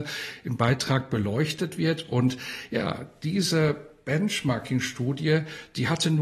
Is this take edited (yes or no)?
no